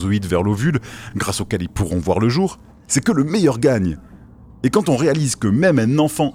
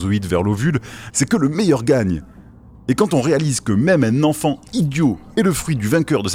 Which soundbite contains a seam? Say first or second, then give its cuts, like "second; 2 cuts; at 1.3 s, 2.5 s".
second; 1 cut; at 1.1 s